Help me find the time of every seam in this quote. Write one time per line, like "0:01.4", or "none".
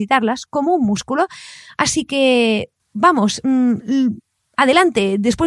0:02.8

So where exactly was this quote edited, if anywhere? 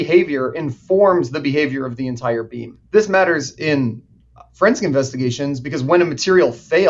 0:02.8

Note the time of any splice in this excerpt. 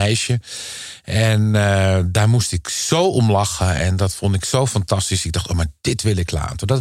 none

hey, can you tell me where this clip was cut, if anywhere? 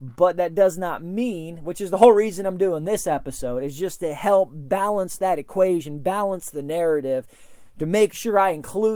none

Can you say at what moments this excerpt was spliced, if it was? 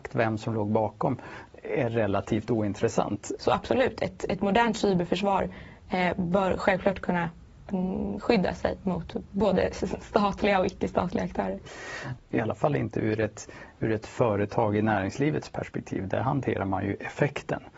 0:03.4
0:12.2

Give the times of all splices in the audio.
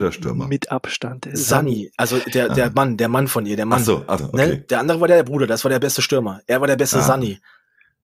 0:04.2

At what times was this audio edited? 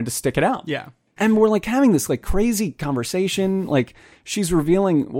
0:01.2

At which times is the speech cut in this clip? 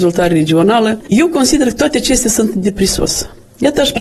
0:01.0

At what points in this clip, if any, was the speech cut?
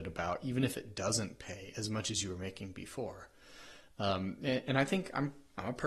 none

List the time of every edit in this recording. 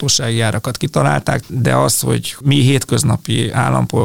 0:01.4

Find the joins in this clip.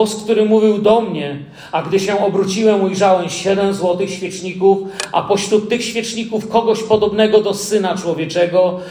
none

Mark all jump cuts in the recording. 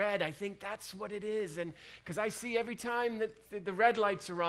none

